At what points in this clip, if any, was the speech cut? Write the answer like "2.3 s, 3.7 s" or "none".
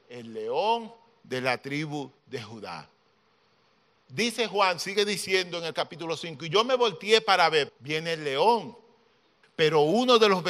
7.7 s, 9.4 s